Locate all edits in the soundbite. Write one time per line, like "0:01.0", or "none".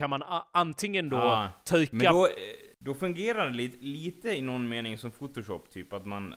0:02.7